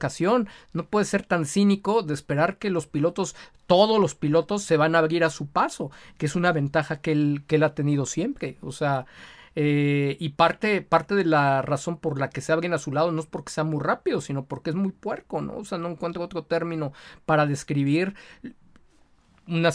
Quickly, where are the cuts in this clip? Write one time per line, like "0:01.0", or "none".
none